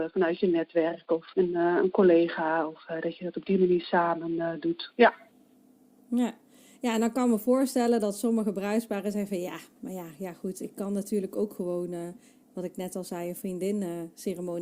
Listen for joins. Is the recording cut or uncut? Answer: cut